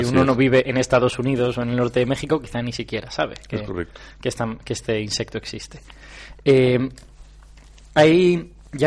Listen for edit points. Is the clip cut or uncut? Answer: uncut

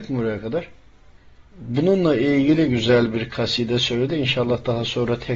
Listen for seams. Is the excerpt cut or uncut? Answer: uncut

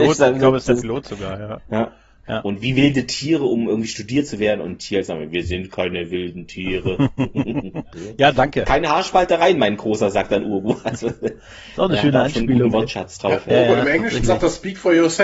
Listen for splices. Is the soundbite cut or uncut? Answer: uncut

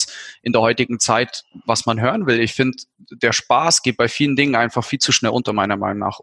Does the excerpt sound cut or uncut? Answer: uncut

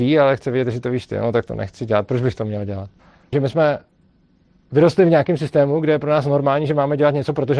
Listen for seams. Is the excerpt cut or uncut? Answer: cut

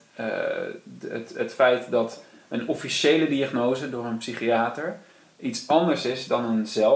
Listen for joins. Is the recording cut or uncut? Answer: uncut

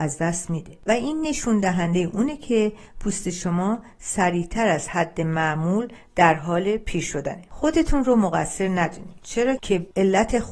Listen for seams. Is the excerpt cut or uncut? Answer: cut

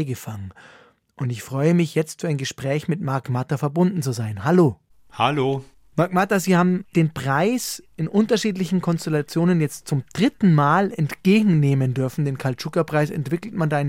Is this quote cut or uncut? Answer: uncut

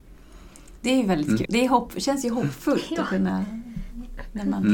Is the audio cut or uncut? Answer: cut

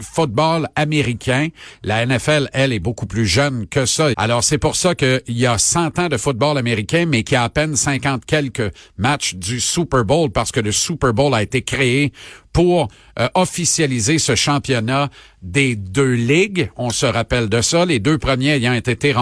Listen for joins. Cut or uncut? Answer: cut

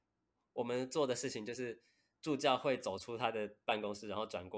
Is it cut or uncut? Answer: uncut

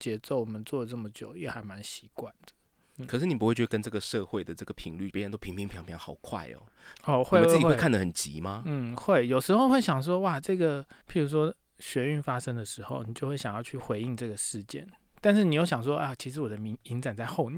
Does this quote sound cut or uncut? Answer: cut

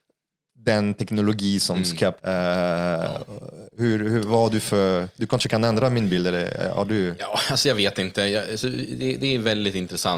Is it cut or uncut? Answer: cut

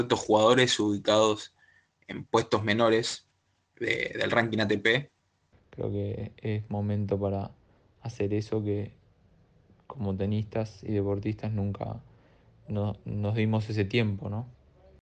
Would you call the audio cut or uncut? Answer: cut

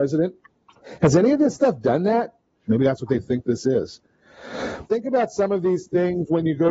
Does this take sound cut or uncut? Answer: cut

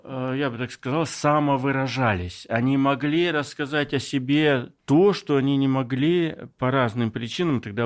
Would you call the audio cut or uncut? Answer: cut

